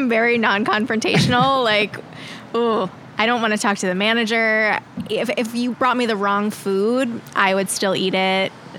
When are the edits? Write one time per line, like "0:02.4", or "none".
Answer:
none